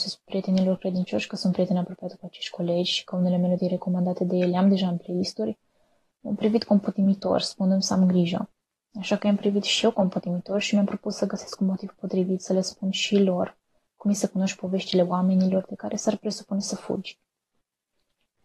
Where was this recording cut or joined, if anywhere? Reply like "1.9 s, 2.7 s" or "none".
none